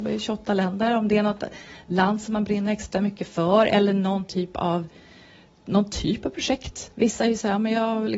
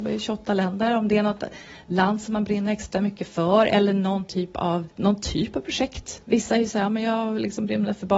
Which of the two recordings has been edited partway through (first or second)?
second